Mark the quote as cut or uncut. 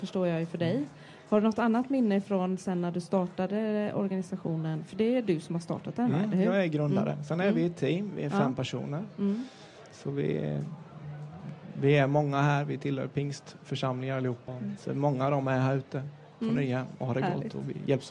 cut